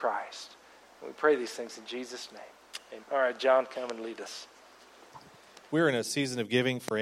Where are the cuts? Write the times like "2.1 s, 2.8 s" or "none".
3.0 s, 5.7 s